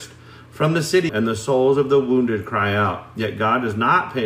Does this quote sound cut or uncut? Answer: cut